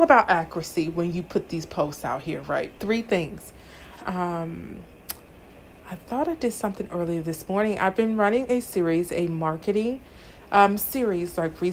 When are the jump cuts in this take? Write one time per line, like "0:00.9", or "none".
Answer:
0:02.8
0:04.0